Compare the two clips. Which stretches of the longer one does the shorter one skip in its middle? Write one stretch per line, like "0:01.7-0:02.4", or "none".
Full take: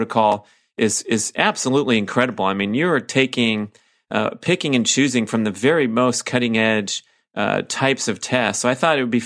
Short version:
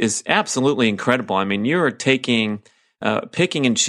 none